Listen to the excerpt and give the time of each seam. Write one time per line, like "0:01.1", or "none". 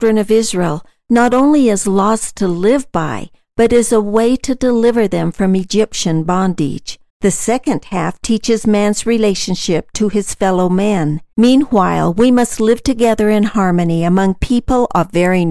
0:07.1
0:11.3